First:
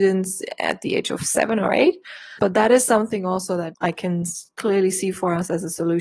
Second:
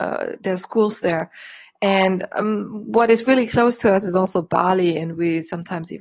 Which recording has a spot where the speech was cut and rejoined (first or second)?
first